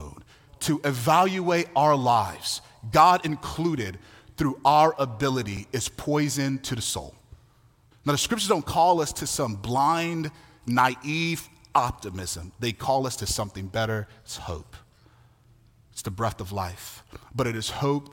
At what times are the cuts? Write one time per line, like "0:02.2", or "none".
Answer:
0:07.9